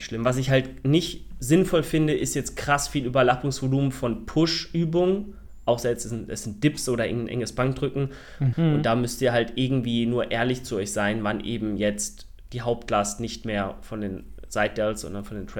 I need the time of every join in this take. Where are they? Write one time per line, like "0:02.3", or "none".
0:08.5

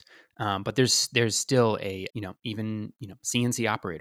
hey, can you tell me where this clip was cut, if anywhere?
0:02.1

